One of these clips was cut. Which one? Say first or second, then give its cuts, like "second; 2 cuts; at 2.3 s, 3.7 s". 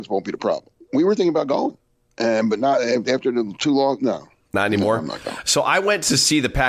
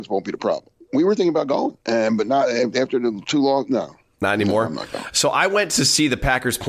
second; 1 cut; at 1.8 s